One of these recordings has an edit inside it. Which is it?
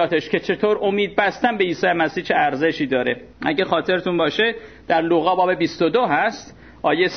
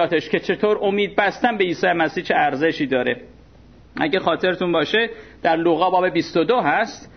first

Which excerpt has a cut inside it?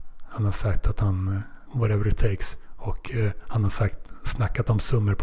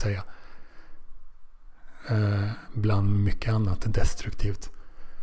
first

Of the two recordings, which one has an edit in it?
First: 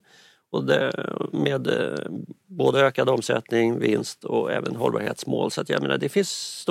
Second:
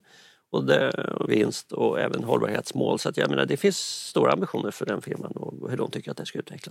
second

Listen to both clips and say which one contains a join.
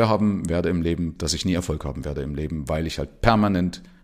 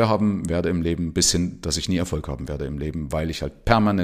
first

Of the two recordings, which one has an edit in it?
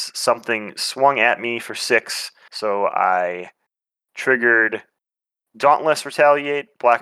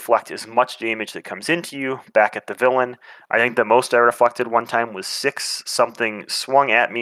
first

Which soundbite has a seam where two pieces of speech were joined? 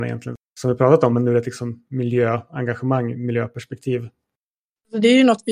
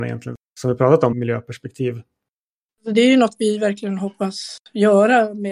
second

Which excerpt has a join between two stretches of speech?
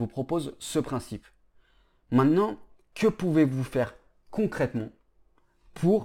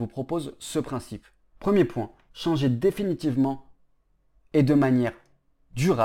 second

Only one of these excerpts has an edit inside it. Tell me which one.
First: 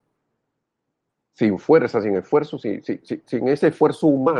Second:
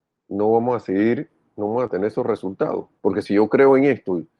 second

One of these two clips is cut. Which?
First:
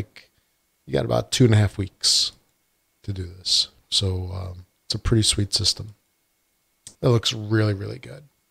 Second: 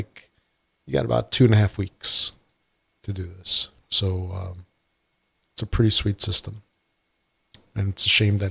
first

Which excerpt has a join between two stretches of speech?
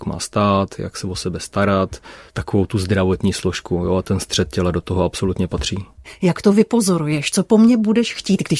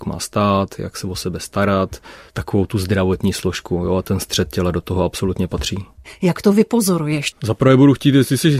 second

